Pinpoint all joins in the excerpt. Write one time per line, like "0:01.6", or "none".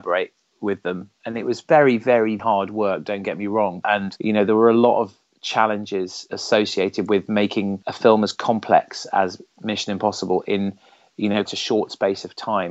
0:02.4
0:11.5

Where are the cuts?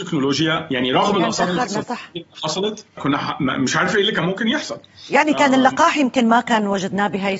0:03.0

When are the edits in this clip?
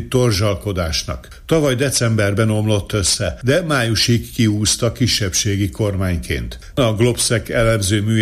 0:06.7

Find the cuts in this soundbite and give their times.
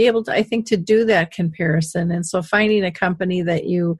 none

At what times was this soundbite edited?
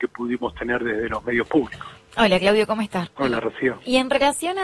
0:03.1

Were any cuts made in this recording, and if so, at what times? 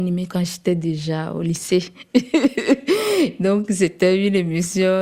none

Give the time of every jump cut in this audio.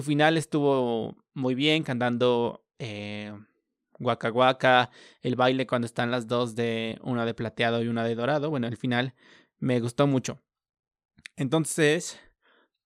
none

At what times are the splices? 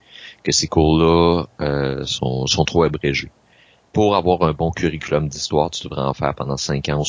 none

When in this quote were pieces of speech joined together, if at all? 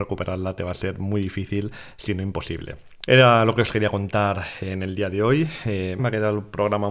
0:03.1
0:06.0

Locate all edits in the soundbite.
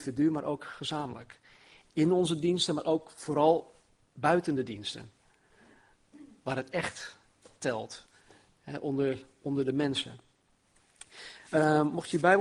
none

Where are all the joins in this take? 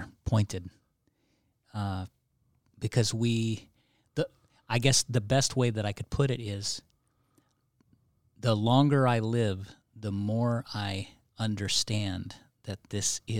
none

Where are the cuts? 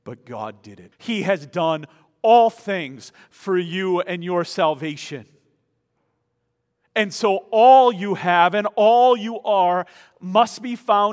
0:00.9

